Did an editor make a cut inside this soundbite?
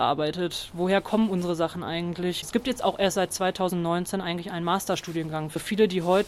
no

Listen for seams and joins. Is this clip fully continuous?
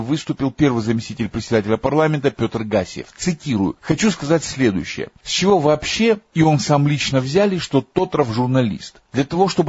yes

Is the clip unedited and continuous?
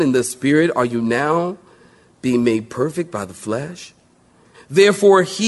no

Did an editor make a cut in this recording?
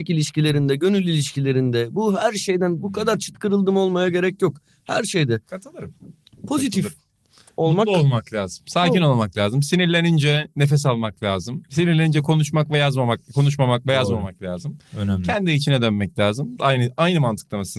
yes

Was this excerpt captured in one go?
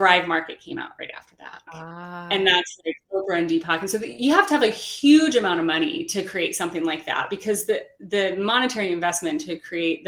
no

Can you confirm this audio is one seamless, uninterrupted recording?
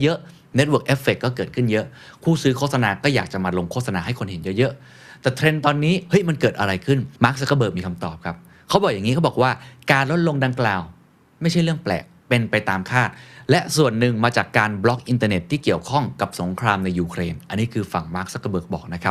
no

